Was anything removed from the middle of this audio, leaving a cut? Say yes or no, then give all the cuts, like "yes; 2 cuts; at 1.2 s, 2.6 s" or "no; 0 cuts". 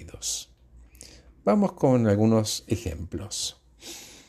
no; 0 cuts